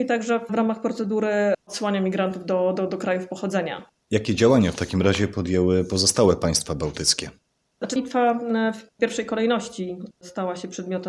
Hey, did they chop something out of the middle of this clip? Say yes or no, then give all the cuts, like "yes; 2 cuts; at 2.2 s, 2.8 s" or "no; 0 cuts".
yes; 1 cut; at 8.0 s